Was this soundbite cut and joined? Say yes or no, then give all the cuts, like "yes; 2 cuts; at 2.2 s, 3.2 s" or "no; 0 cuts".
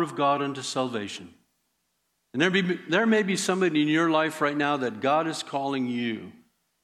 yes; 1 cut; at 2.1 s